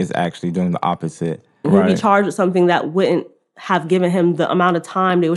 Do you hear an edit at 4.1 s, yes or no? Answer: no